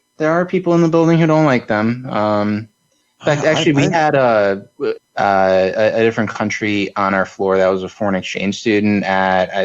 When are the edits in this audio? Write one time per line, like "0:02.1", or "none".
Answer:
0:05.0